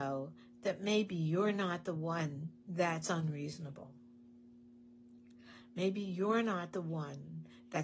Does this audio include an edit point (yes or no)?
yes